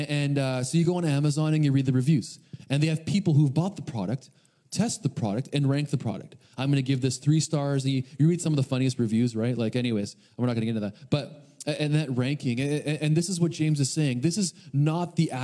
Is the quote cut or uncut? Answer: uncut